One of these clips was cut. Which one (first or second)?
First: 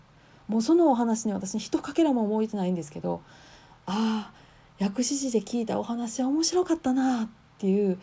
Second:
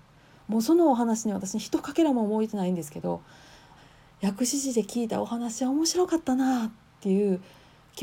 second